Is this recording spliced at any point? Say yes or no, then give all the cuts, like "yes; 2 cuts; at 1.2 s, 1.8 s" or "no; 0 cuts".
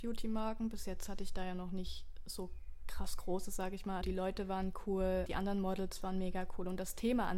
yes; 2 cuts; at 4.0 s, 5.3 s